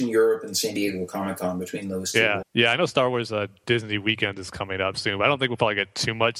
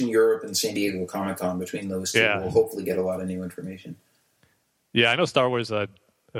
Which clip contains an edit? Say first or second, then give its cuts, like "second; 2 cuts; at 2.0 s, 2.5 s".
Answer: first; 2 cuts; at 2.4 s, 3.6 s